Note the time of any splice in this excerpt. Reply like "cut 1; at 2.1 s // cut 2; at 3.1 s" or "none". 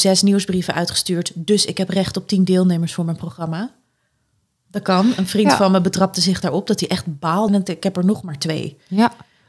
cut 1; at 7.5 s